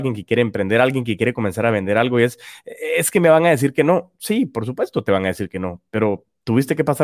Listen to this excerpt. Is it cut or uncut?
uncut